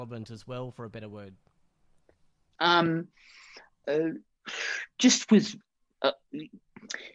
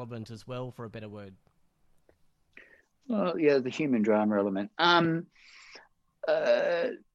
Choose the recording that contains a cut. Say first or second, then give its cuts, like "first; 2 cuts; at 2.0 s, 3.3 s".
first; 2 cuts; at 2.6 s, 3.8 s